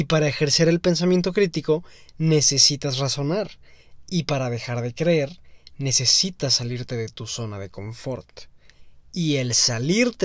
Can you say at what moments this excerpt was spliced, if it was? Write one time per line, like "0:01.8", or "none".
0:04.1